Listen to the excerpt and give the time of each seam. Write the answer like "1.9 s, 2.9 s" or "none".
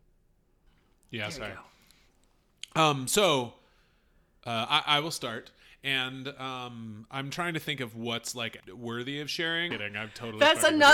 8.6 s, 9.7 s